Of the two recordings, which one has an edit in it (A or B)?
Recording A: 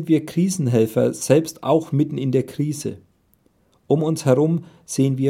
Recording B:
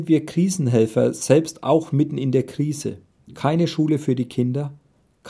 B